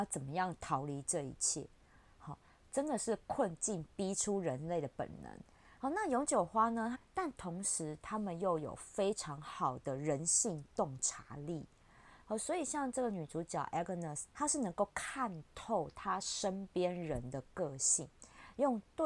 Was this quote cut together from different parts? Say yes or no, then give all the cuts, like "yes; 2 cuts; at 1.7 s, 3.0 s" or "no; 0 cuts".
yes; 3 cuts; at 5.8 s, 6.9 s, 14.3 s